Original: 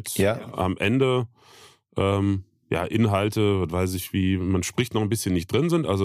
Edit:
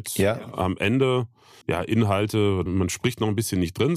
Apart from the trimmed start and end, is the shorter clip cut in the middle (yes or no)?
yes